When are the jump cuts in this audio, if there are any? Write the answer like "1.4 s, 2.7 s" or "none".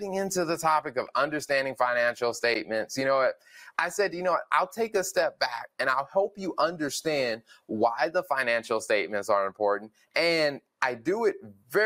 none